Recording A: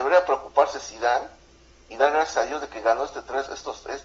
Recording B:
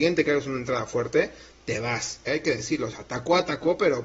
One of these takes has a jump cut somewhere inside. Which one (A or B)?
B